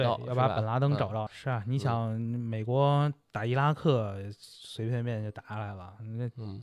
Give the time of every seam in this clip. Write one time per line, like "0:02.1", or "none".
0:01.3